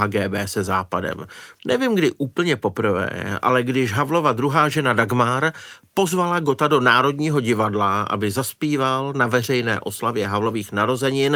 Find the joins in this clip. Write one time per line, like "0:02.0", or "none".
0:01.6